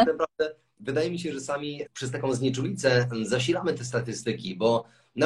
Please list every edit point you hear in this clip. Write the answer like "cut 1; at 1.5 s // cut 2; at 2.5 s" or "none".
cut 1; at 1.9 s